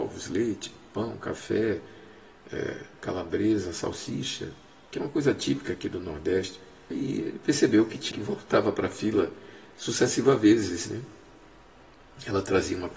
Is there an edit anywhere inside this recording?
yes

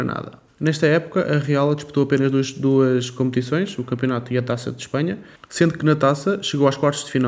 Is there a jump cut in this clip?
no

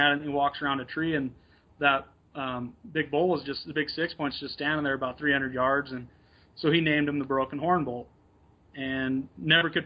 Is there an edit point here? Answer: no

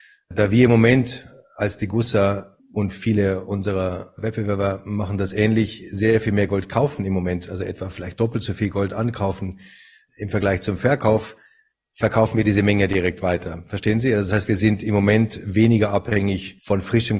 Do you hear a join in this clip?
no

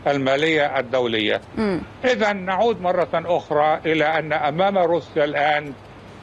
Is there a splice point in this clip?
no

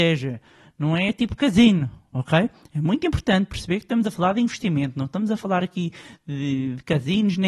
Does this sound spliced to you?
no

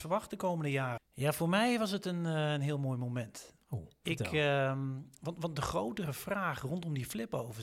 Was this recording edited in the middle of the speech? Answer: yes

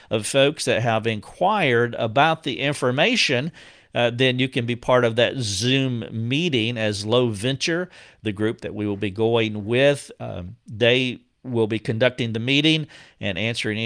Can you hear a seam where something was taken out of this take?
no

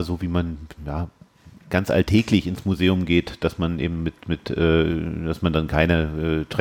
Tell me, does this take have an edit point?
no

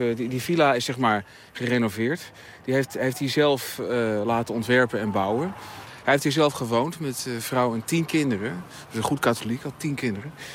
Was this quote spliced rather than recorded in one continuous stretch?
yes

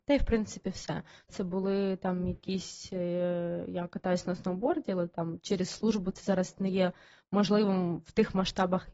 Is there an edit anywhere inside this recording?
yes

